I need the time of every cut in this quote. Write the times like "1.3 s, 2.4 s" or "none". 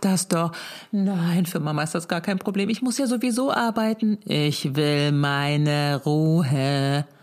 none